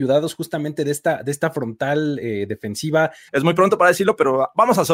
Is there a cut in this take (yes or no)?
yes